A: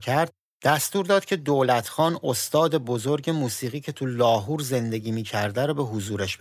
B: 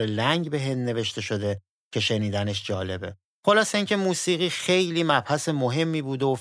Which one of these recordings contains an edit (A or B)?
B